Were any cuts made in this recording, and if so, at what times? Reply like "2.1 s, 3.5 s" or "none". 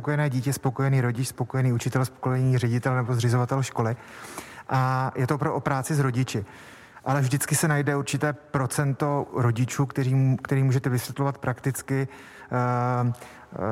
none